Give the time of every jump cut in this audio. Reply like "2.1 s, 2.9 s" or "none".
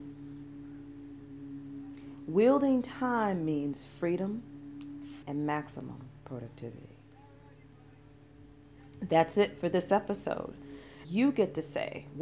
5.2 s, 11.0 s